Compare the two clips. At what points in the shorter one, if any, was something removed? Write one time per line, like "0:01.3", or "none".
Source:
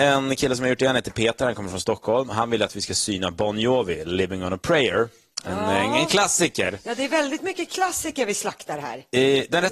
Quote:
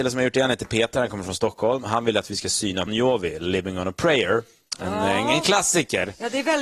0:02.9